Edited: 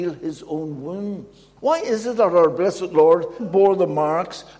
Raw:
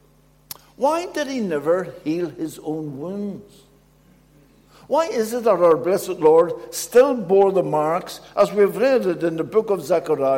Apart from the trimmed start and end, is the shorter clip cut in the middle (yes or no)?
yes